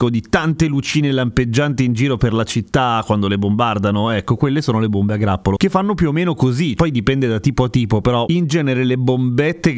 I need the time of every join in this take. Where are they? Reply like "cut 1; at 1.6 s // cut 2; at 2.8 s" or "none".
cut 1; at 6.8 s